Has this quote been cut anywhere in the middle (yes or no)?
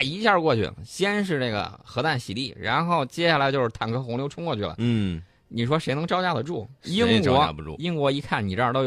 no